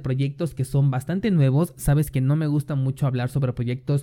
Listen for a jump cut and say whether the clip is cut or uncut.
uncut